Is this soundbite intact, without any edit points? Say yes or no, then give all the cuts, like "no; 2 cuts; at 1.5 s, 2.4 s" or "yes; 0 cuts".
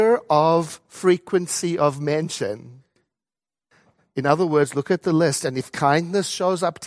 yes; 0 cuts